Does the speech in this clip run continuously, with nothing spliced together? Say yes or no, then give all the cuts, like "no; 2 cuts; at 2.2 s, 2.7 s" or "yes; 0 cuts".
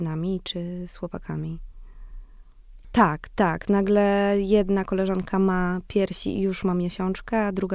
no; 1 cut; at 2.8 s